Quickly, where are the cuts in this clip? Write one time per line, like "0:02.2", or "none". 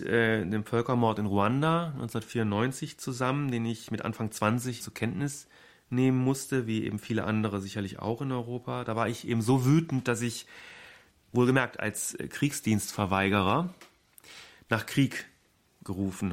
0:04.8